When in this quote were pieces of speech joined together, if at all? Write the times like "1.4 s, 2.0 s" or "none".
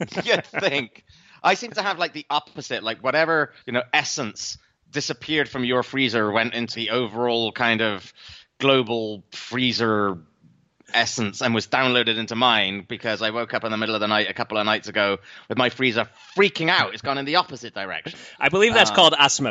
3.6 s, 6.7 s